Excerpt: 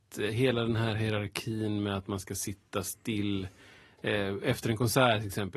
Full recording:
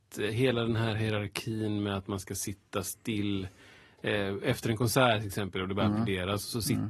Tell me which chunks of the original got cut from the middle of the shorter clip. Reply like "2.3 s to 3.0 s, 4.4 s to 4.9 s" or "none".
none